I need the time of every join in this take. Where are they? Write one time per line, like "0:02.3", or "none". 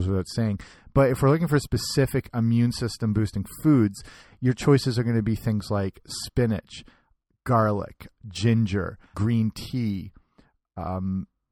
0:09.1